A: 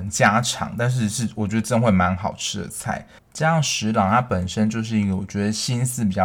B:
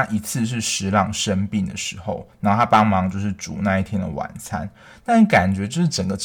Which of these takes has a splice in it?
A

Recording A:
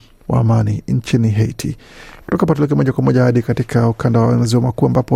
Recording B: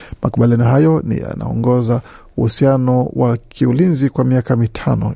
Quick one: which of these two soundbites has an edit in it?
A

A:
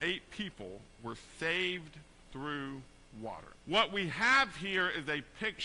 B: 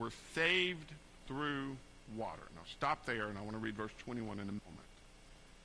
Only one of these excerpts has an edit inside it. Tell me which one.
A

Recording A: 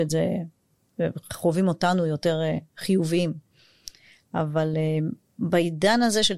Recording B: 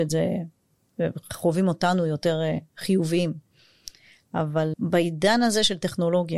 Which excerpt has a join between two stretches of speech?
B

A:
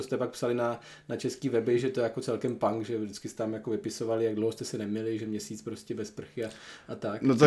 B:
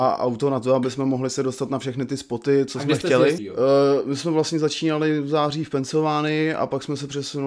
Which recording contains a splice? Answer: B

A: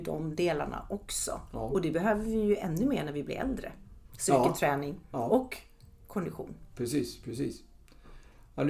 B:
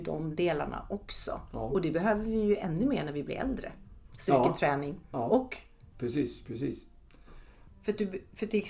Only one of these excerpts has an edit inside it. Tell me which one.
B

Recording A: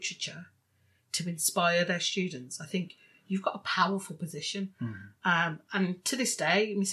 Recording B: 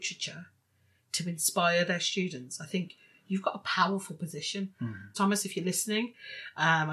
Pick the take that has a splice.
B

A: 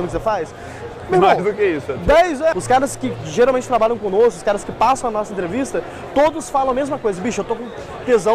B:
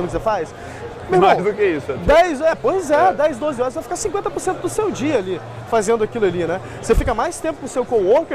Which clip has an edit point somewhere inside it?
A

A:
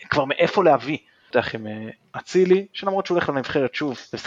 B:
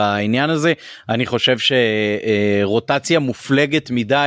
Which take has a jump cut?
A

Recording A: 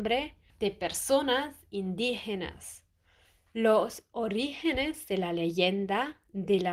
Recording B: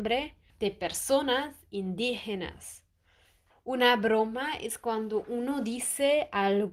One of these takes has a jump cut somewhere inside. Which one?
B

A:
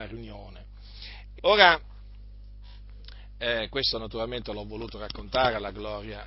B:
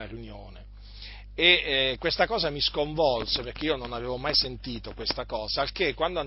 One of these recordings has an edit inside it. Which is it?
A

